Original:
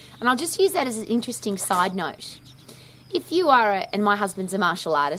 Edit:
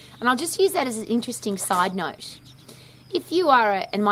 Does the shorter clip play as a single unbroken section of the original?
yes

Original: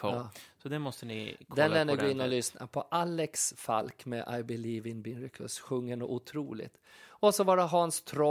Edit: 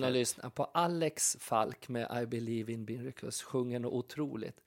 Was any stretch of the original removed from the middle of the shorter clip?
no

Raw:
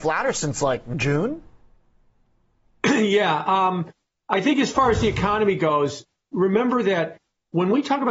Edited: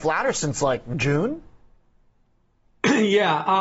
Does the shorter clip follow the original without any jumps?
yes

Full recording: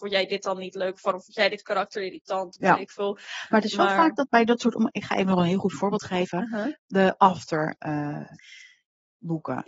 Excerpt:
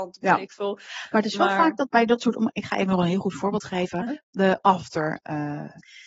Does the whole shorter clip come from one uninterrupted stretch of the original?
no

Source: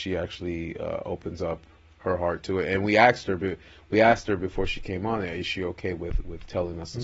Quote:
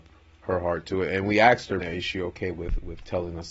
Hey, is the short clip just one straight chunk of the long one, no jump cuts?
no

